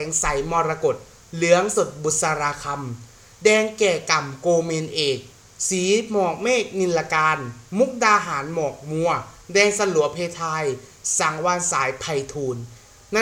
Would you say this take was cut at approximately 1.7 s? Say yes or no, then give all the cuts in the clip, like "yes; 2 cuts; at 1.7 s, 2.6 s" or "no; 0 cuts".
yes; 1 cut; at 1.7 s